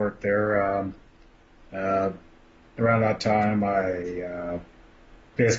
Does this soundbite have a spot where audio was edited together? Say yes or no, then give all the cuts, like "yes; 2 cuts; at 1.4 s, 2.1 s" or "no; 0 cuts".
no; 0 cuts